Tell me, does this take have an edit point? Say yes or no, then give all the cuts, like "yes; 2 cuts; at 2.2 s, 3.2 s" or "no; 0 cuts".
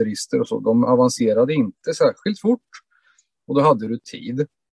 no; 0 cuts